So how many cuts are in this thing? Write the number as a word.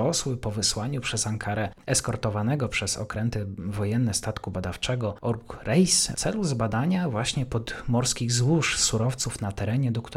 zero